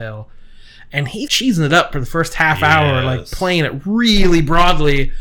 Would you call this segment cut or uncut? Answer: cut